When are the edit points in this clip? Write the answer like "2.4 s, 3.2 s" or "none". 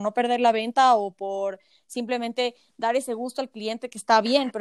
none

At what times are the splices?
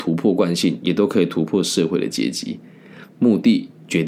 3.1 s

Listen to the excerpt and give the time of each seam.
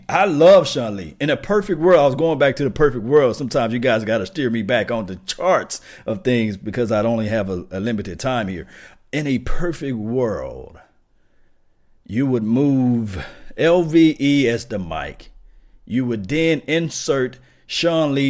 none

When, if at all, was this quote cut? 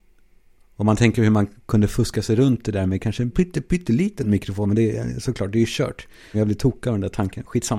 3.3 s, 6.3 s

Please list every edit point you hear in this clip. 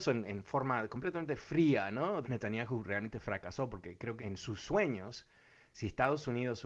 2.2 s, 4.2 s

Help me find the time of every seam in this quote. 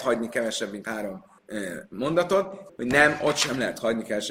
1.4 s, 2.7 s

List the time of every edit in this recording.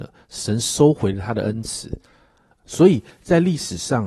2.5 s

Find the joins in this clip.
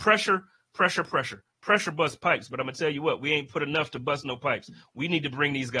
none

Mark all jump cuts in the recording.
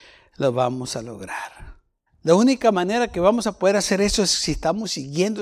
2.1 s

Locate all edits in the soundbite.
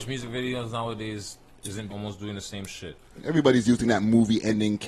1.9 s

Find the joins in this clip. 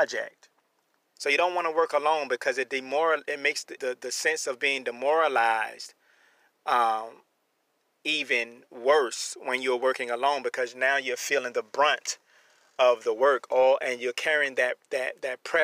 1.1 s, 3.8 s

